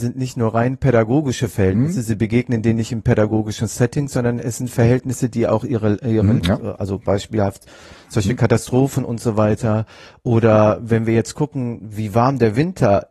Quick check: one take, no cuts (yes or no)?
no